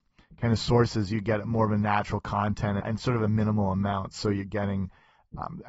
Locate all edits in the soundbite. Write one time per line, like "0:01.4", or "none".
0:02.8